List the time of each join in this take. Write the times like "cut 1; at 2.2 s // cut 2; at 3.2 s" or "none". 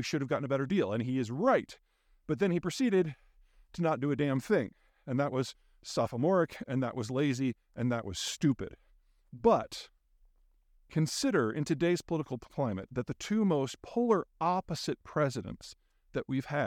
none